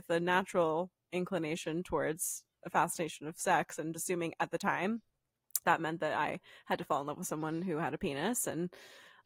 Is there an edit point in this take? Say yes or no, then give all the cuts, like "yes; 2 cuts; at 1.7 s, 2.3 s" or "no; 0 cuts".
yes; 2 cuts; at 3.9 s, 5.6 s